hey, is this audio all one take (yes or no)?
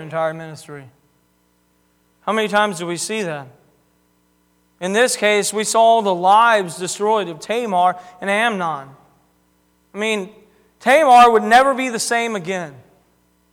yes